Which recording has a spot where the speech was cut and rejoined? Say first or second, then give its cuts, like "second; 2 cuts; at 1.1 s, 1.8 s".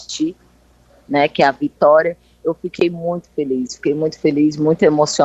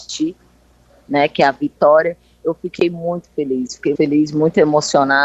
second; 1 cut; at 3.9 s